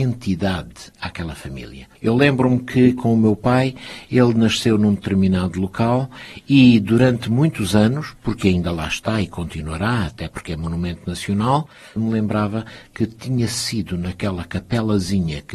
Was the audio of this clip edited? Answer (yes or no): yes